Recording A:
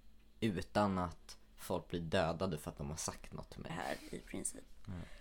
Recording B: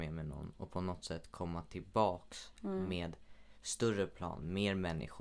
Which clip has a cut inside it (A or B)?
A